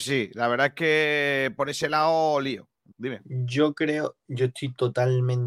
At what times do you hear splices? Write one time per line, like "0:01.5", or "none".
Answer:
0:02.9